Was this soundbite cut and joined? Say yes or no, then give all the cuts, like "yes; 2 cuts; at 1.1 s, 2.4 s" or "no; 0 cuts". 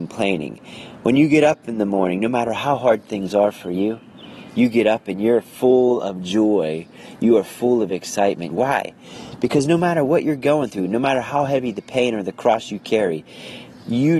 yes; 1 cut; at 8.5 s